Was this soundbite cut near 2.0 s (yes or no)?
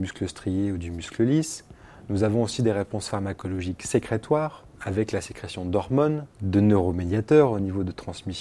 no